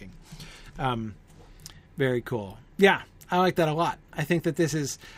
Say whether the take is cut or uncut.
cut